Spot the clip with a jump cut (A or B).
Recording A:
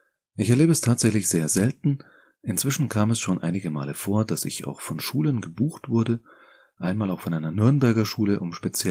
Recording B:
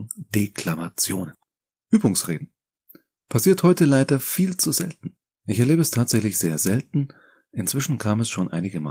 B